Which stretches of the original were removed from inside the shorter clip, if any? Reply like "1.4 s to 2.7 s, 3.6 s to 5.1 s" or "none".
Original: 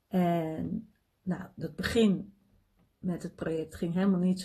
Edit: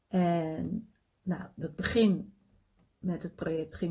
none